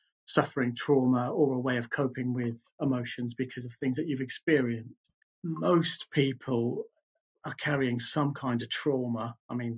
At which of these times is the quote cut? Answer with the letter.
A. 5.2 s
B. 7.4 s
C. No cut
A